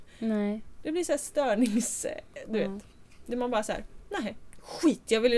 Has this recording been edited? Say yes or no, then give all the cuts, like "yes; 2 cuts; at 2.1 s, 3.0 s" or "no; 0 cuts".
no; 0 cuts